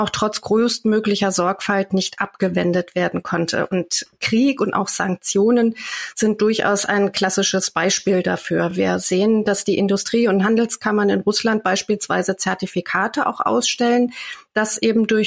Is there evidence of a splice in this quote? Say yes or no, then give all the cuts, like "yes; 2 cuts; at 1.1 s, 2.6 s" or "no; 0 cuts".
no; 0 cuts